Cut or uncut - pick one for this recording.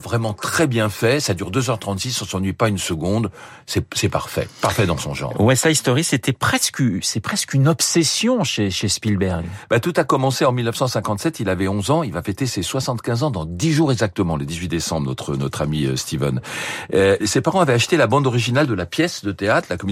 cut